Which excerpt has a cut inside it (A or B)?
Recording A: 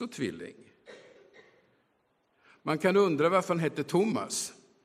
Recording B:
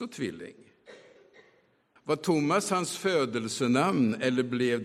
B